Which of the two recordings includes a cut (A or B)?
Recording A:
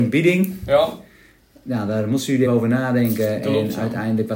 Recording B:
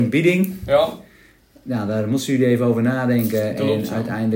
A